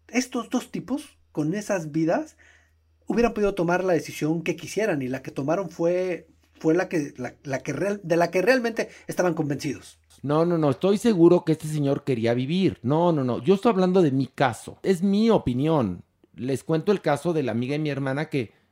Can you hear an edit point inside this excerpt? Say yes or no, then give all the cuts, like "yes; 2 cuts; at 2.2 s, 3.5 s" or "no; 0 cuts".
no; 0 cuts